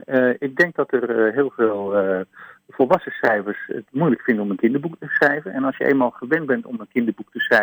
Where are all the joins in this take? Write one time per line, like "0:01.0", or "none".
none